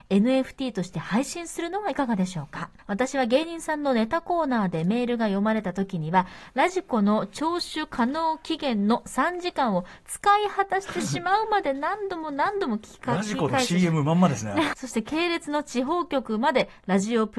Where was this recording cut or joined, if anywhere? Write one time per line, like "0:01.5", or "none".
0:02.8
0:14.7